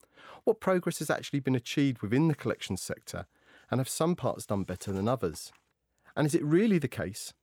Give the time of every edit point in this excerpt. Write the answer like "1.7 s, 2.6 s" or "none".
none